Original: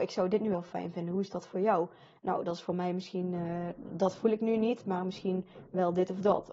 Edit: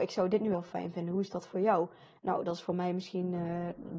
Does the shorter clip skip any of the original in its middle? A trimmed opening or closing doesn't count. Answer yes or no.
no